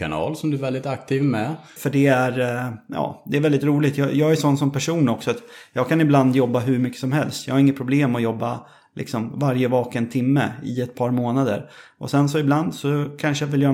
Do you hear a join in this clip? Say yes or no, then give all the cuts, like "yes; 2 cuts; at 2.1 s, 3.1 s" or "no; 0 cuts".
yes; 1 cut; at 1.8 s